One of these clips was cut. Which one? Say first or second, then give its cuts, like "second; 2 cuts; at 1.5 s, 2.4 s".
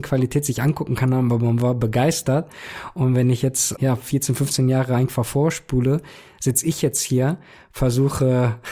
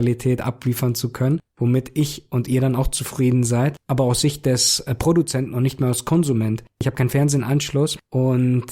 first; 1 cut; at 3.7 s